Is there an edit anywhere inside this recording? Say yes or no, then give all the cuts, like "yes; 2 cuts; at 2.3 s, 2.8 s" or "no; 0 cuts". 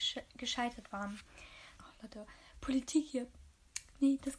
yes; 1 cut; at 1.8 s